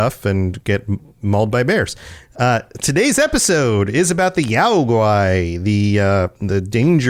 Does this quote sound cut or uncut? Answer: uncut